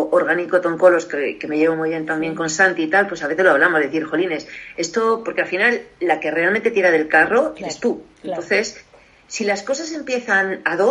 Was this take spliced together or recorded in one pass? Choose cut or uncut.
uncut